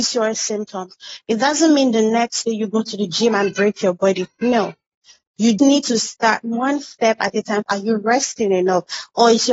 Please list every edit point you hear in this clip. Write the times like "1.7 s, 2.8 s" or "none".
5.6 s, 7.6 s